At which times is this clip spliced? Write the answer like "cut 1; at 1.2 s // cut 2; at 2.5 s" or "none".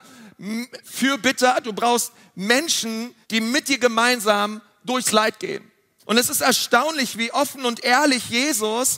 cut 1; at 3.2 s // cut 2; at 6.0 s